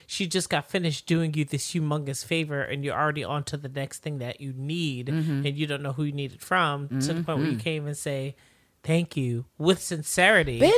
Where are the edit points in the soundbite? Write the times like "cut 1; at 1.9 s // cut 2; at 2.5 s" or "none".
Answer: none